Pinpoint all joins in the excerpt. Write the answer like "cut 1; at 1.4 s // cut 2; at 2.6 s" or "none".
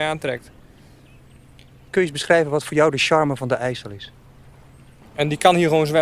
cut 1; at 5.0 s

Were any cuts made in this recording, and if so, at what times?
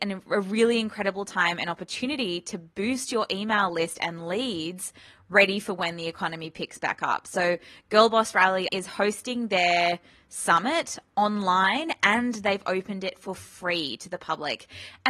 cut 1; at 8.7 s

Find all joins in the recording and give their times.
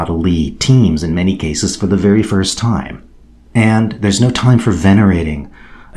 cut 1; at 3.5 s

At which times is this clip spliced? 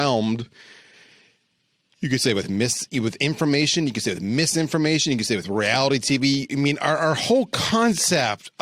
none

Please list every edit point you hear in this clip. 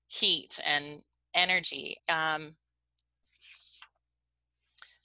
cut 1; at 2.0 s

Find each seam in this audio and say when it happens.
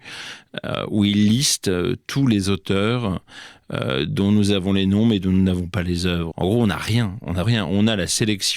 cut 1; at 6.3 s // cut 2; at 7.4 s

